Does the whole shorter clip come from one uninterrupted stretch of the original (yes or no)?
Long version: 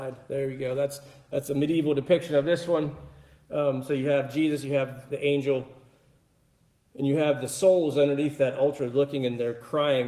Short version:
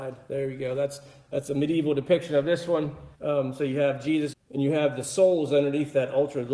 no